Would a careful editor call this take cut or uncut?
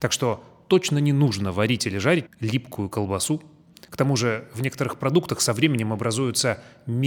cut